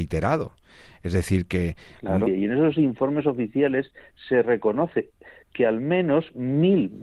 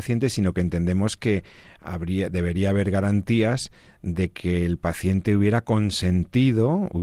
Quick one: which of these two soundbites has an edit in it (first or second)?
first